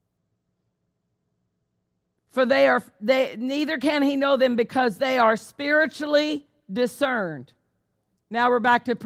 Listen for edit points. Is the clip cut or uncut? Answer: uncut